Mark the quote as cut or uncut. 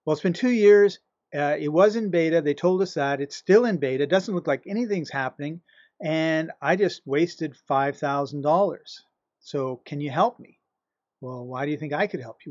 uncut